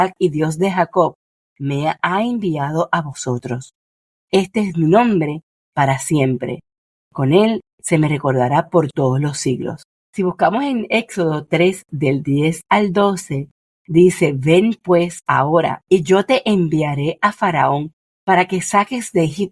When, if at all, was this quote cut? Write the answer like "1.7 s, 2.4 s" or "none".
10.0 s